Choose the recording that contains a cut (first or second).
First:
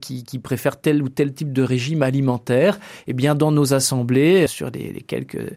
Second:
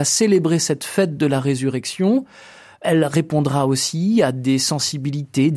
first